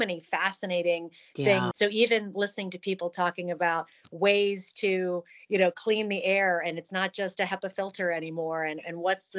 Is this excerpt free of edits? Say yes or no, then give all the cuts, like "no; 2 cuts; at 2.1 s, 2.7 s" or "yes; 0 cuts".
no; 1 cut; at 1.7 s